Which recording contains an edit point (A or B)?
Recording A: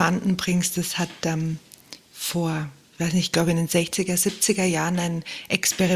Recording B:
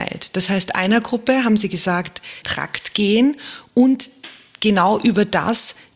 B